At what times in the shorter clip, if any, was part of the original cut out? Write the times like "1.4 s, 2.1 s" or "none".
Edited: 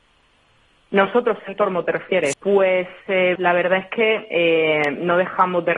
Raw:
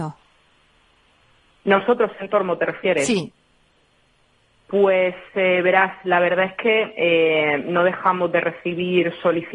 2.3 s, 3.4 s